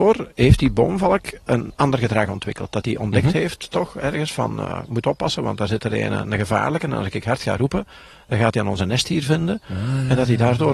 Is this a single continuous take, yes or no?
yes